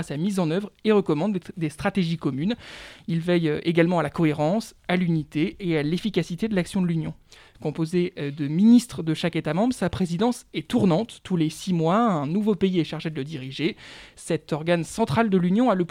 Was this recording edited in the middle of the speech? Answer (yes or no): yes